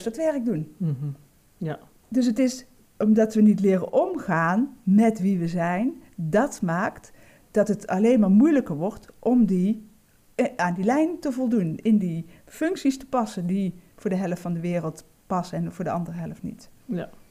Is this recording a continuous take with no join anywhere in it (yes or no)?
yes